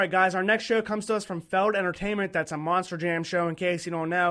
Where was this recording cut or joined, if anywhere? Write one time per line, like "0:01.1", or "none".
none